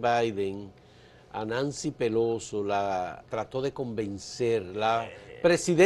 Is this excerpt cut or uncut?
cut